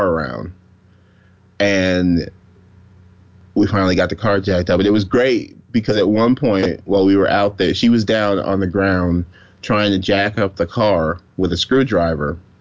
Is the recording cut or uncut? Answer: uncut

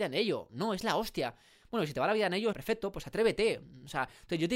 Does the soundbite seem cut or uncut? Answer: cut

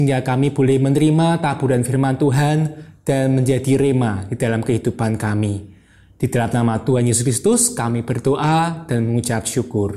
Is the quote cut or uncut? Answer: uncut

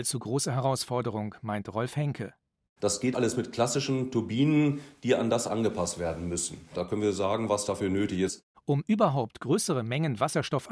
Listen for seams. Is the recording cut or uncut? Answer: cut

